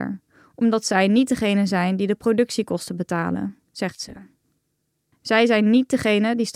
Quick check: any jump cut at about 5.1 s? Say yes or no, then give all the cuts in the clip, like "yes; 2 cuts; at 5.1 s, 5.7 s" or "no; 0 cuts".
yes; 1 cut; at 5.1 s